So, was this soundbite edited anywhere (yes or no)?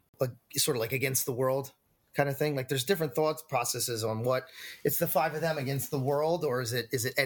no